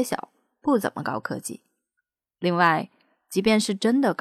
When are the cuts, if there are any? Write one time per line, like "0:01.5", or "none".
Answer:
none